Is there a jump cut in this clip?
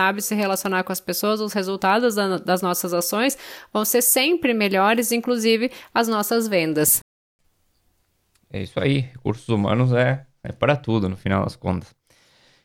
no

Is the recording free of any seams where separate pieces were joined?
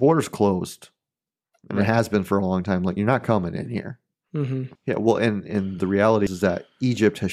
no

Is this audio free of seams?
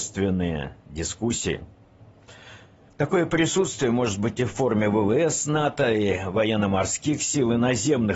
no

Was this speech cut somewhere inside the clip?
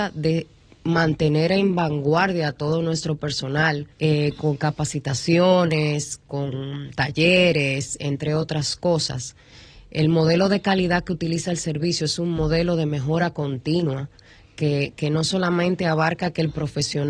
yes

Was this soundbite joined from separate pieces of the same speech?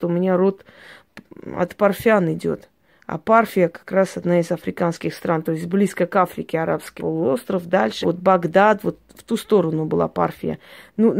yes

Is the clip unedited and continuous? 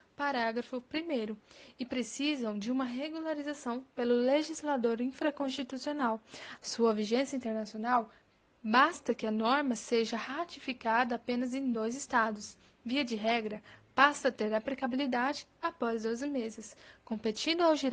no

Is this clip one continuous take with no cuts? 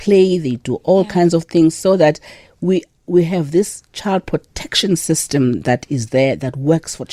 yes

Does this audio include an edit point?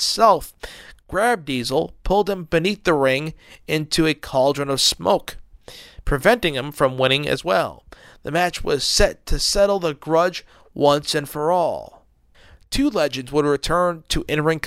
no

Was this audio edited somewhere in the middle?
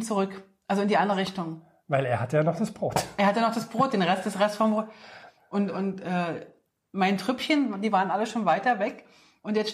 no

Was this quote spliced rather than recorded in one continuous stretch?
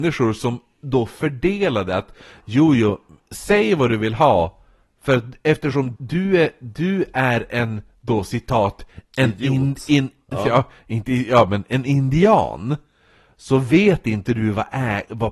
yes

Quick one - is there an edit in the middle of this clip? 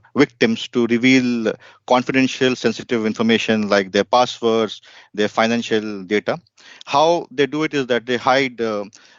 no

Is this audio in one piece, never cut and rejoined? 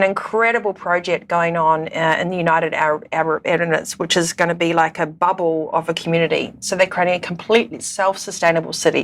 yes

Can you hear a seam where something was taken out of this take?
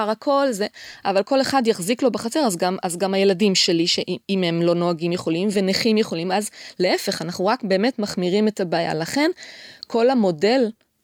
yes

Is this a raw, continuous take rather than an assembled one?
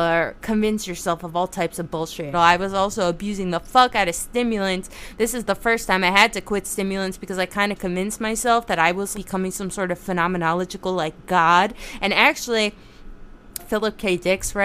no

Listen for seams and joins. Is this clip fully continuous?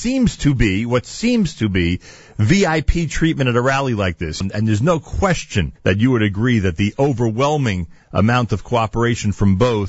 no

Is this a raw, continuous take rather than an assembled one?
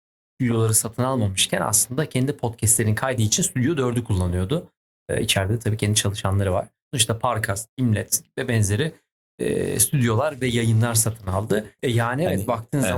no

